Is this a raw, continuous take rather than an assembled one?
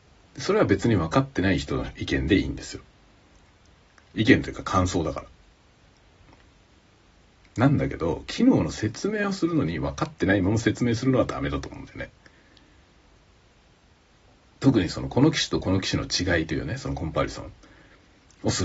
yes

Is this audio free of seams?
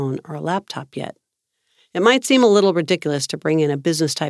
yes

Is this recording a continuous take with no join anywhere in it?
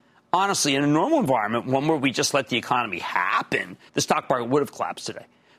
no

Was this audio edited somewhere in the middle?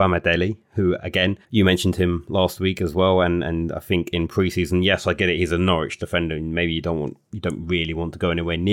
yes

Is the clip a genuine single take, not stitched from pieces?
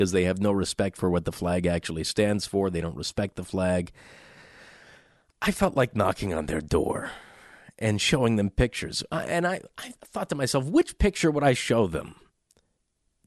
yes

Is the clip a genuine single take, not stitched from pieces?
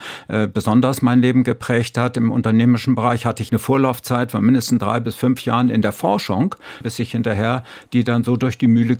no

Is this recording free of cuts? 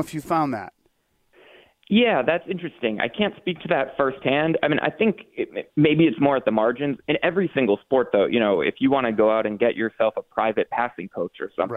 yes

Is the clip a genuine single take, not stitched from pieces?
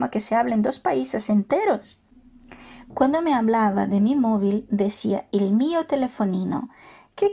no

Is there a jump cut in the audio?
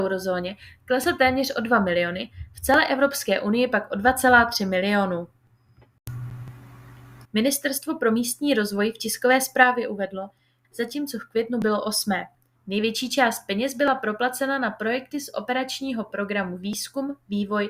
yes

